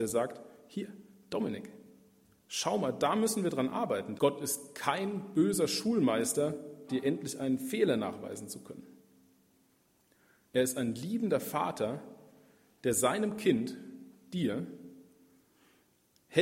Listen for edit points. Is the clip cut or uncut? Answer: cut